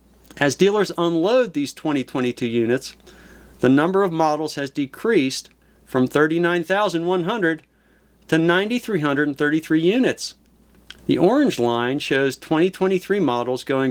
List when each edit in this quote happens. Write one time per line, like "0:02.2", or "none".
0:11.0